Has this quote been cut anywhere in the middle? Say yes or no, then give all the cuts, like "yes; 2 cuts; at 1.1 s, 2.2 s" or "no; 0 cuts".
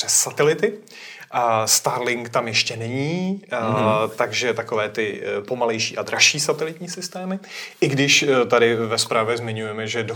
no; 0 cuts